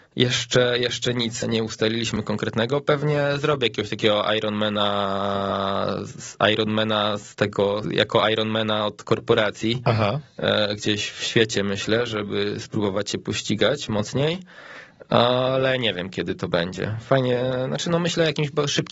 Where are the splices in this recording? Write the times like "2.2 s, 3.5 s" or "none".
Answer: 1.4 s, 7.8 s